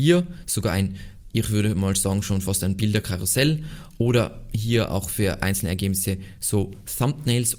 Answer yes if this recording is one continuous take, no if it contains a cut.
yes